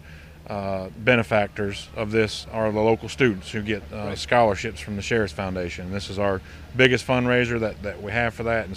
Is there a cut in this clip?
no; 0 cuts

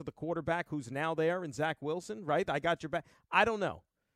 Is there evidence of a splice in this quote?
no; 0 cuts

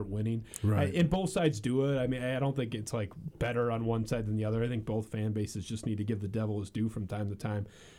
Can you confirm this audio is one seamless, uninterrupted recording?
yes; 0 cuts

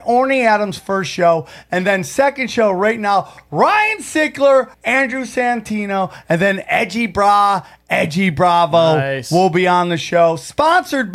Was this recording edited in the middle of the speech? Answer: yes; 1 cut; at 4.7 s

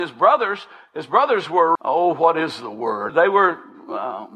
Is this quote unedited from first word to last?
no; 2 cuts; at 1.8 s, 3.1 s

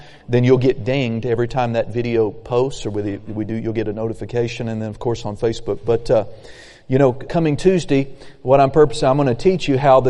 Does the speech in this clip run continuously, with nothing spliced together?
no; 1 cut; at 7.3 s

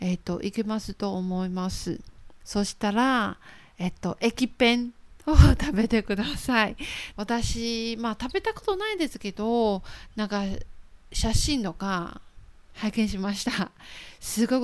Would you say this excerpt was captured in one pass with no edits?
no; 2 cuts; at 2.4 s, 7.1 s

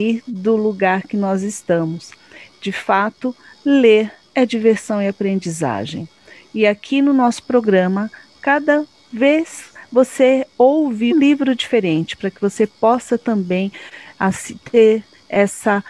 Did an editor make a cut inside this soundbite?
yes; 1 cut; at 11.1 s

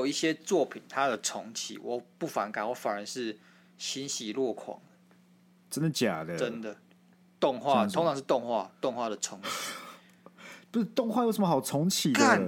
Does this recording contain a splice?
no; 0 cuts

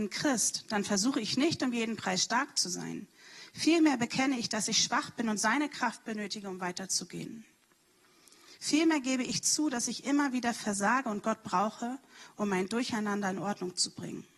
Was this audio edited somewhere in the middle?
yes; 1 cut; at 8.6 s

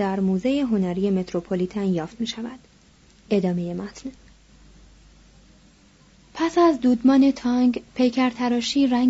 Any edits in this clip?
no; 0 cuts

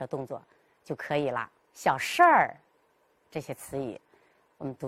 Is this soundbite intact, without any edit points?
no; 1 cut; at 1.6 s

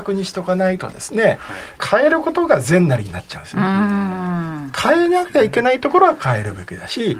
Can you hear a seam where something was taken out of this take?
no; 0 cuts

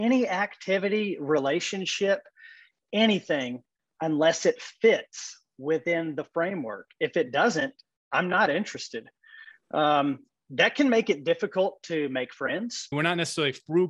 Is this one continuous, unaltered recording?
no; 1 cut; at 12.9 s

